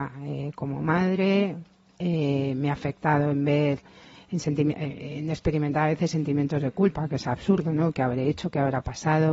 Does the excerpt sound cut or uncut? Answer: uncut